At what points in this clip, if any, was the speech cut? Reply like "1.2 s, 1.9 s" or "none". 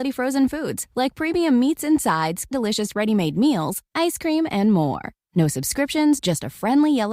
6.2 s